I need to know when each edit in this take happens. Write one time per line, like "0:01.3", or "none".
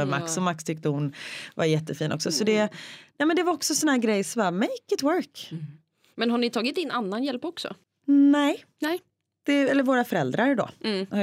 none